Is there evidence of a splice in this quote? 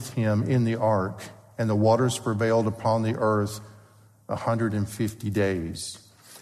no; 0 cuts

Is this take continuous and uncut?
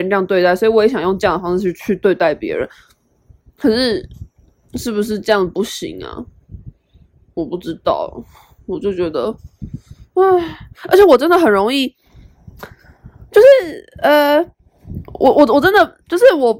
yes; 0 cuts

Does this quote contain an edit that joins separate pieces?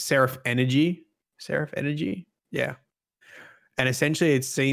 no; 0 cuts

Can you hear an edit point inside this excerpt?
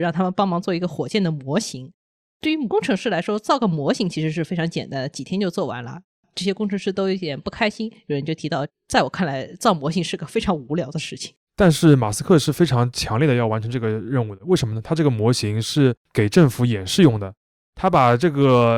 no; 0 cuts

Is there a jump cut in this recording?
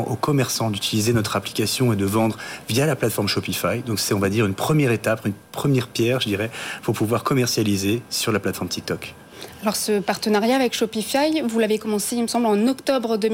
no; 0 cuts

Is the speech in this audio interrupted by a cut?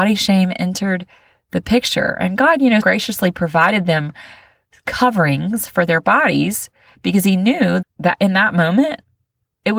yes; 2 cuts; at 2.8 s, 7.8 s

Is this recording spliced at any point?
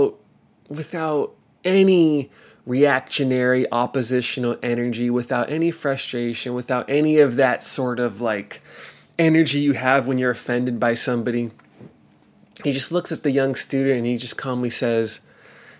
no; 0 cuts

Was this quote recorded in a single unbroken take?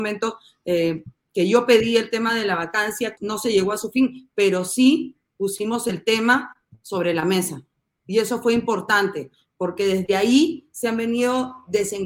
no; 1 cut; at 3.2 s

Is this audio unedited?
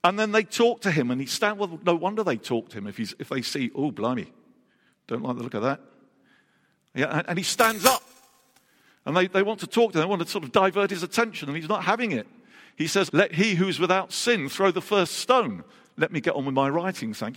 no; 1 cut; at 13.1 s

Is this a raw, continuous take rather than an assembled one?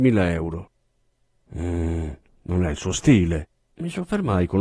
no; 1 cut; at 3.7 s

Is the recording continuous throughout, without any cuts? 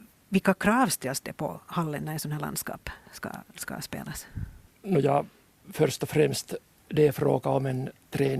yes; 0 cuts

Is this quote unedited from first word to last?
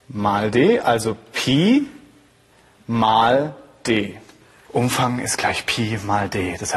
no; 1 cut; at 4.7 s

